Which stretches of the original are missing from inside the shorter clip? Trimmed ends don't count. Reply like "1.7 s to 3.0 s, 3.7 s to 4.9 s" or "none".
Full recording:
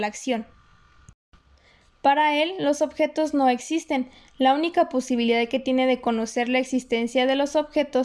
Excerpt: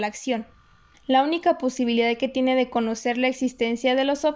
0.9 s to 4.3 s